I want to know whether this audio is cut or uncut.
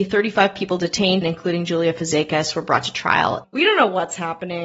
cut